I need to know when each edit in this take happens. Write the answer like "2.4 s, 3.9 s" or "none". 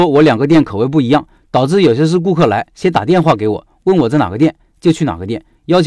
none

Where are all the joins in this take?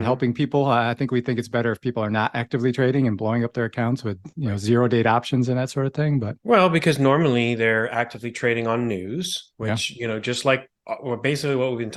6.4 s, 9.5 s

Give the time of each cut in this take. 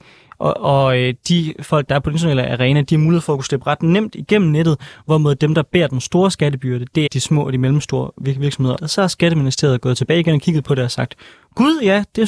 7.1 s, 8.8 s

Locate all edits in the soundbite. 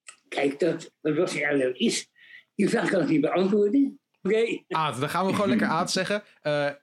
0.9 s, 4.3 s

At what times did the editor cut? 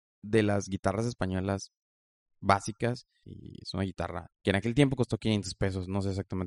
3.2 s, 4.3 s

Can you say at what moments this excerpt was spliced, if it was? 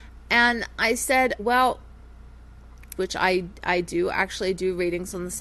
1.4 s, 3.0 s

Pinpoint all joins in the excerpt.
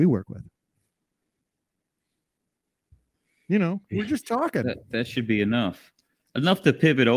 3.9 s

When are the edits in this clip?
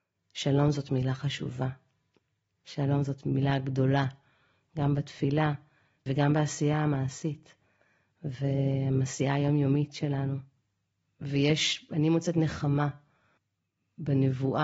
6.1 s

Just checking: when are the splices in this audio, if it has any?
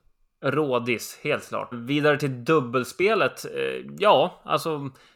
1.7 s

